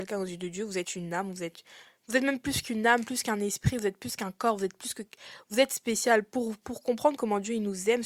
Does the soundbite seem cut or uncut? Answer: uncut